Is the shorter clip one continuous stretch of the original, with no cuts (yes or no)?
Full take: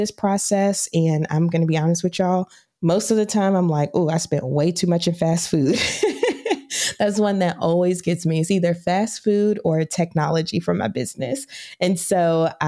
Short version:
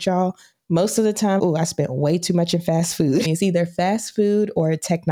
no